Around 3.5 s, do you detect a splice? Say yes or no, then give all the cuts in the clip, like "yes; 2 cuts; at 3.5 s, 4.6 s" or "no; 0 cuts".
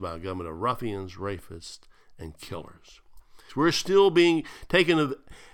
yes; 1 cut; at 3.5 s